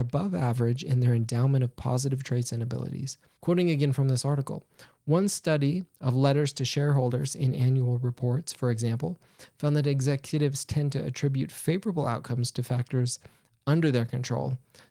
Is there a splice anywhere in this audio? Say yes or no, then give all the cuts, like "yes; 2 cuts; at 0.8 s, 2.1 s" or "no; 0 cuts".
yes; 1 cut; at 3.4 s